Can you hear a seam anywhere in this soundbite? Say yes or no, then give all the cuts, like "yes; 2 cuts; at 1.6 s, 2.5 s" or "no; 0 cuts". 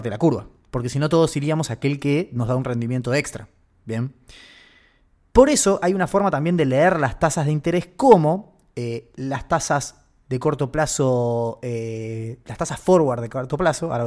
no; 0 cuts